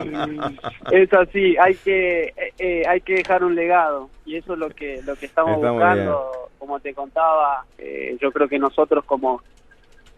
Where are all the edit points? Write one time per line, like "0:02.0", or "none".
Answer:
0:07.7